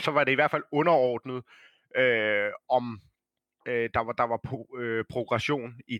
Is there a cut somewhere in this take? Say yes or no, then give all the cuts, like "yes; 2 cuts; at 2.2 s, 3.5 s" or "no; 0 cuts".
no; 0 cuts